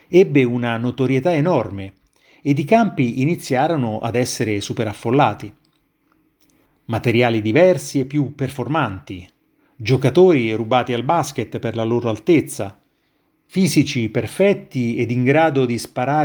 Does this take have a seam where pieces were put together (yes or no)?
yes